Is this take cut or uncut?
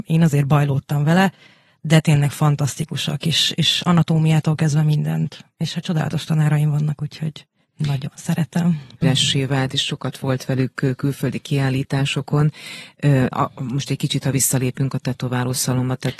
cut